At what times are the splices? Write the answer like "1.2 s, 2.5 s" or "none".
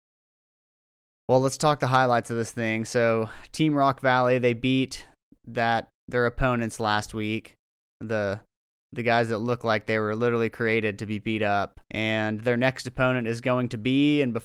11.8 s

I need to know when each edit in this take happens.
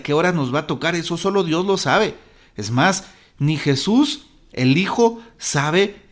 none

